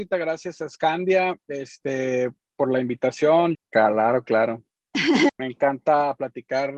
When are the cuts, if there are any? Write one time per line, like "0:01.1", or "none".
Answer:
0:03.5
0:05.3